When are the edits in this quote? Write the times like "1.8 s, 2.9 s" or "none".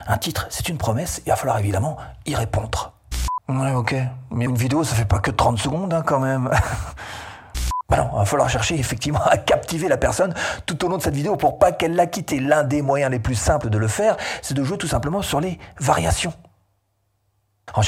4.5 s